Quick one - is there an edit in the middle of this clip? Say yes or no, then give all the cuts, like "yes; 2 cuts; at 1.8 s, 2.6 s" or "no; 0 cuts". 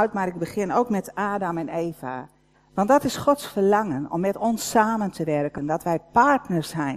yes; 2 cuts; at 2.5 s, 5.6 s